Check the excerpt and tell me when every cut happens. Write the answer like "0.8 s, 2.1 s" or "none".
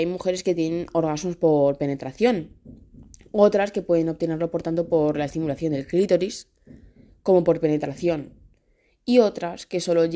none

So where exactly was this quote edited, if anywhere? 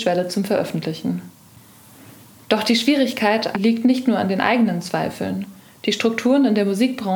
3.5 s

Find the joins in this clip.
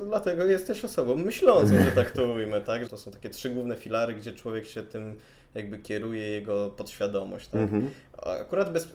2.9 s

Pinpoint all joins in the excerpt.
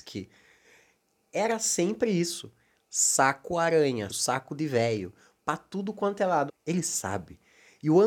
4.1 s, 6.5 s

